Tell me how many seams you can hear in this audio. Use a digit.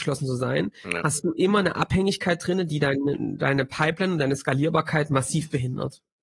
0